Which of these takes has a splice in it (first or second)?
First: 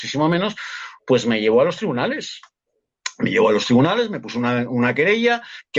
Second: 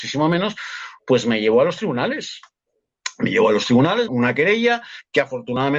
second